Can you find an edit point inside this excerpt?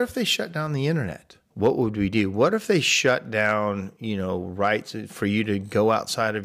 yes; 1 cut; at 1.5 s

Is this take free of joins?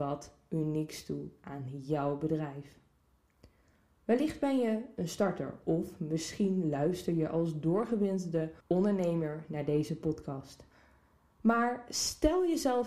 no; 1 cut; at 8.6 s

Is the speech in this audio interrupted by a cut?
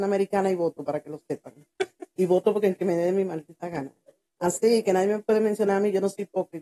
no; 0 cuts

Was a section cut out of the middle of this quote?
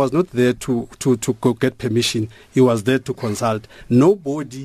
no; 0 cuts

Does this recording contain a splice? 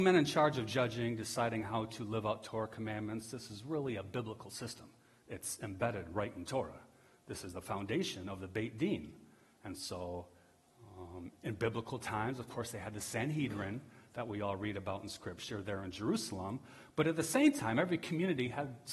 no; 0 cuts

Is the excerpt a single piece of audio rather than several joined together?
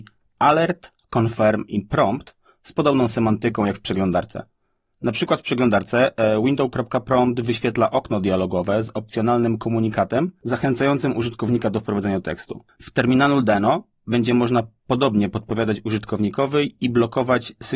yes; 0 cuts

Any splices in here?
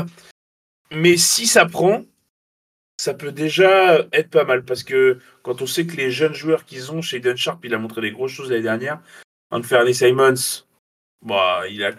no; 0 cuts

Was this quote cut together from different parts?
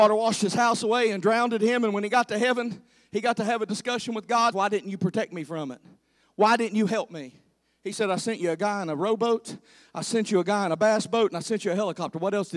yes; 1 cut; at 4.5 s

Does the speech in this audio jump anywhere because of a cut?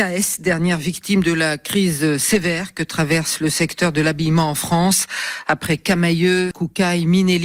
yes; 1 cut; at 6.5 s

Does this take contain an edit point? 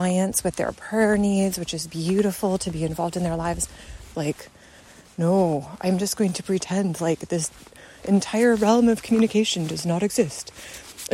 yes; 1 cut; at 4.1 s

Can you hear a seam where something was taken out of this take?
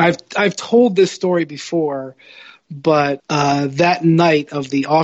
no; 0 cuts

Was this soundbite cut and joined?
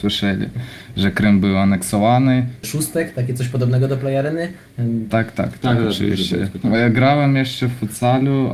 yes; 2 cuts; at 2.6 s, 5.1 s

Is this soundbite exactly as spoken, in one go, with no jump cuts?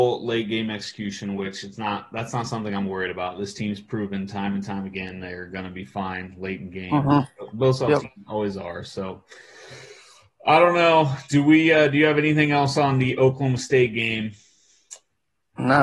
yes; 0 cuts

